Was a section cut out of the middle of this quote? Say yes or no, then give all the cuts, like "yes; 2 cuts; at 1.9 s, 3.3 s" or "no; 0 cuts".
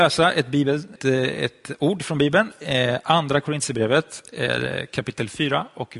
yes; 1 cut; at 1.0 s